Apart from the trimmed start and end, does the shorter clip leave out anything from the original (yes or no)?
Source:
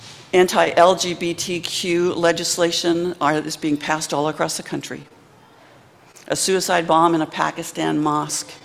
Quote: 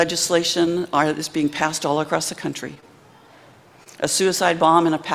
no